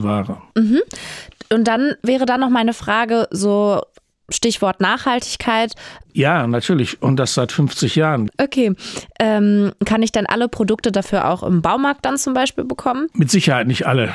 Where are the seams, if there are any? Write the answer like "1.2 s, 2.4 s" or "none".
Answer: 6.1 s, 8.3 s